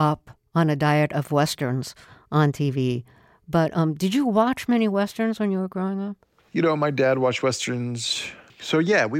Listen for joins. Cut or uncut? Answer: uncut